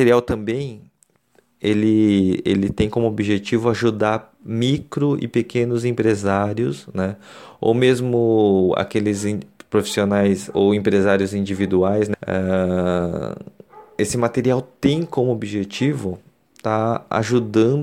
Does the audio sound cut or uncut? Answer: cut